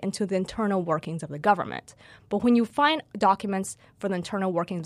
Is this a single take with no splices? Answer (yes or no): yes